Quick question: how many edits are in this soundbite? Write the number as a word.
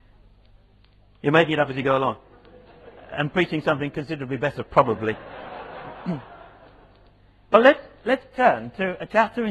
zero